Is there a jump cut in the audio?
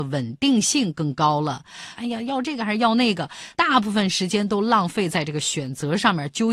yes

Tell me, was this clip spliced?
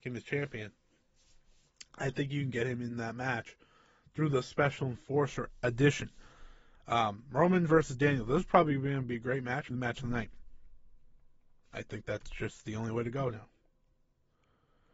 yes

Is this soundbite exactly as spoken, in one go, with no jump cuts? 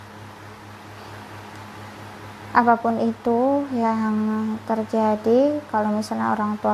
yes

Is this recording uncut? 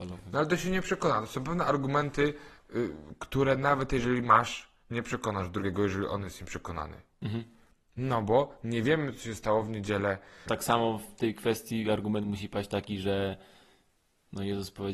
no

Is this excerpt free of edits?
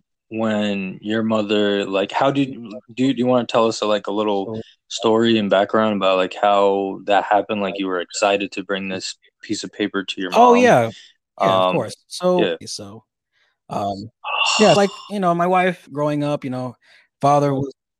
no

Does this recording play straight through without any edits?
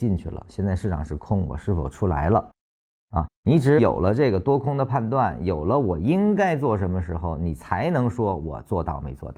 no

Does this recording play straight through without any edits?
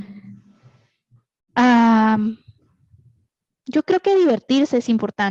yes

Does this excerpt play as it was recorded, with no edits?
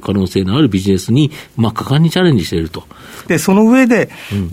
no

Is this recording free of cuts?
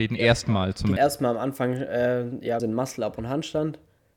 no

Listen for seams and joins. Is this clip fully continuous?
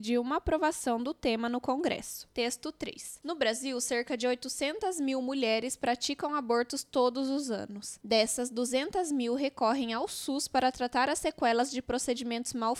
yes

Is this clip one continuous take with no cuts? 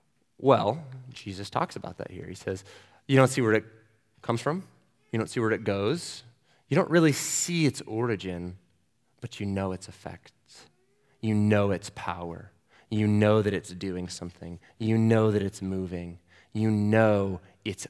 yes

